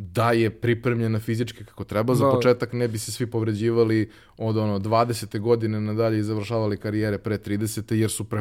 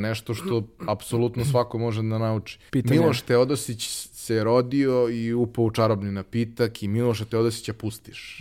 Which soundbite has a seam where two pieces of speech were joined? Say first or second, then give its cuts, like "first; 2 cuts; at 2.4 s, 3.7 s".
second; 1 cut; at 2.7 s